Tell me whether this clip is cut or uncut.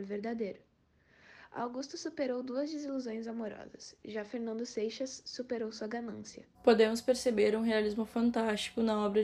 cut